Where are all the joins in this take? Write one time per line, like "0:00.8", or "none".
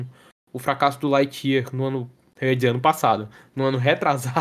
none